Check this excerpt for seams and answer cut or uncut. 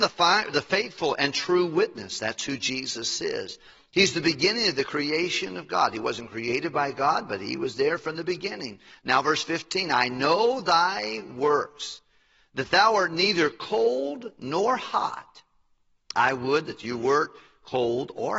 uncut